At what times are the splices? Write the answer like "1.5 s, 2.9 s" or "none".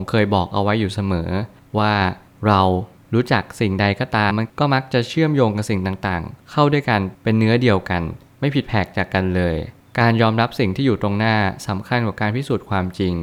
4.3 s